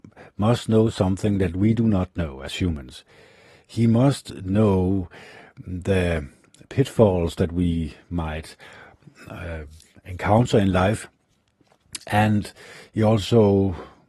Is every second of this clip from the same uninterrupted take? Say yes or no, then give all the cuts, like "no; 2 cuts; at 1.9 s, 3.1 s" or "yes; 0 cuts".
yes; 0 cuts